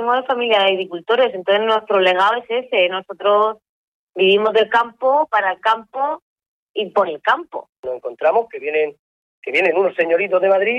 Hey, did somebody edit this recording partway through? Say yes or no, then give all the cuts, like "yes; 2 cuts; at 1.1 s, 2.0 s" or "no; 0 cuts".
no; 0 cuts